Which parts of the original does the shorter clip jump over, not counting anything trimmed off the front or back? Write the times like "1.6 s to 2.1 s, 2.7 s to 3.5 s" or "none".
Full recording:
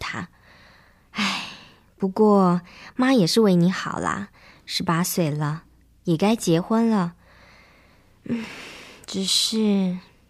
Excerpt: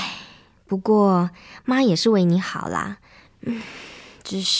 4.6 s to 8.1 s